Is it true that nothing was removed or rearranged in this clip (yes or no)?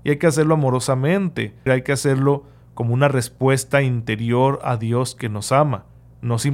no